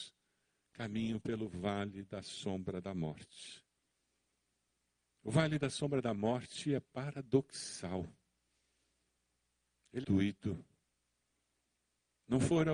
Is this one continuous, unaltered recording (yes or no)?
no